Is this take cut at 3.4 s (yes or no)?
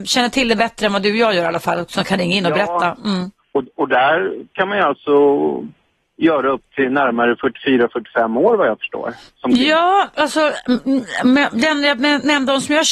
yes